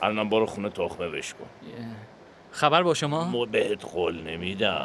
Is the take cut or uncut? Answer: uncut